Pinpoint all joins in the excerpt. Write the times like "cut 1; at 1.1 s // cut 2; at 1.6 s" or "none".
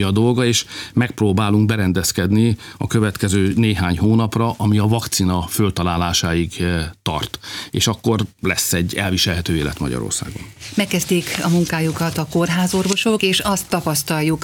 none